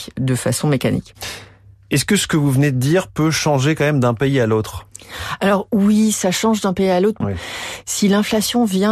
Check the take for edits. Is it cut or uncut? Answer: cut